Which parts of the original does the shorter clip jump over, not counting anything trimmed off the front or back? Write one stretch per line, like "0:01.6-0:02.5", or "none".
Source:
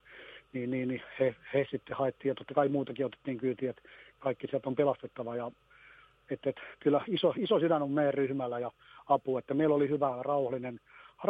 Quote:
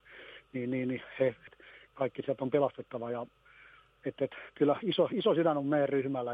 0:01.5-0:03.7